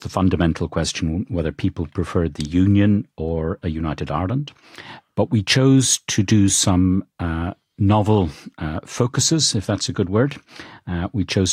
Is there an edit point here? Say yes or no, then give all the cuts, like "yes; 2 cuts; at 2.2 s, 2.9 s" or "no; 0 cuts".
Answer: yes; 1 cut; at 5.1 s